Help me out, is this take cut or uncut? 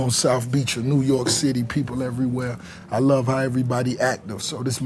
uncut